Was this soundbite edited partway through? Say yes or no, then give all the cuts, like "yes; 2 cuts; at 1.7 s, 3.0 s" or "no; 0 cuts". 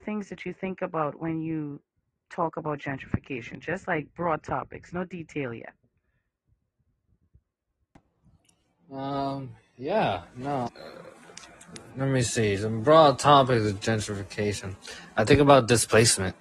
yes; 1 cut; at 10.7 s